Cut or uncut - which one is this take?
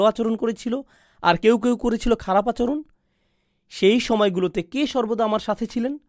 uncut